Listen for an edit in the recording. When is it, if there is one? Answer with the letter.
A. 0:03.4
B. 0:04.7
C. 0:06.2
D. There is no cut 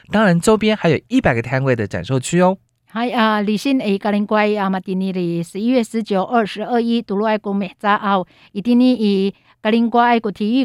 D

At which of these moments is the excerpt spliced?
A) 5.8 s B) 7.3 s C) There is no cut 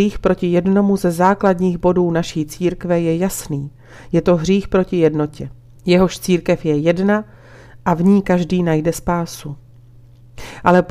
A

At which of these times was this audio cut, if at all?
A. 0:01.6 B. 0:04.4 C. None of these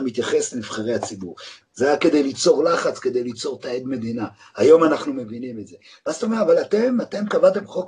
A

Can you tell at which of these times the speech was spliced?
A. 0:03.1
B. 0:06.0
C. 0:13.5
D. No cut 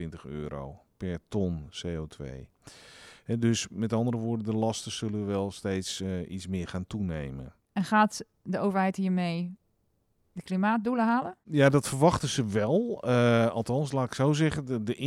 D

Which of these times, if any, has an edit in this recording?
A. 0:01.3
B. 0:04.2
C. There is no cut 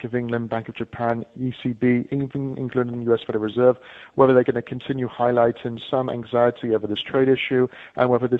C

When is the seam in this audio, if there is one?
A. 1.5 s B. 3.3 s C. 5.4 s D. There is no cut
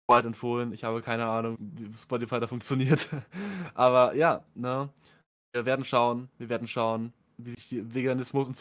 A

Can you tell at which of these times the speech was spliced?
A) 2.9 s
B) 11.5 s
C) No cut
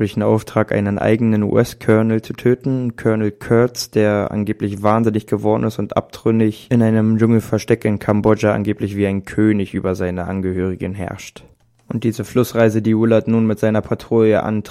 C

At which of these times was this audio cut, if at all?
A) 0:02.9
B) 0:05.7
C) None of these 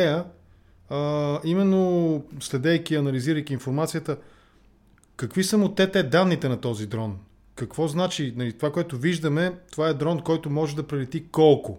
C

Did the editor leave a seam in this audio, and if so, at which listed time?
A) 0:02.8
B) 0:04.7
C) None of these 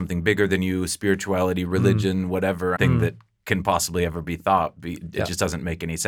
A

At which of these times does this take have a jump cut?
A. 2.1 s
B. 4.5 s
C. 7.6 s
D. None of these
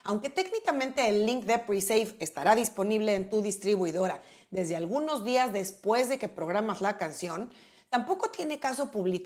D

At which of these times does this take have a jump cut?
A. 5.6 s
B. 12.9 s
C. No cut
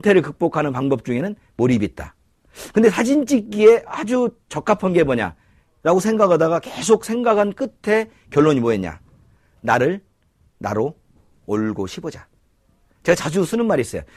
A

